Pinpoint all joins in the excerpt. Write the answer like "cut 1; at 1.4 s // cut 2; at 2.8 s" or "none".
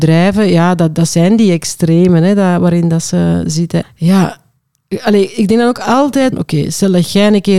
cut 1; at 3.8 s // cut 2; at 6.3 s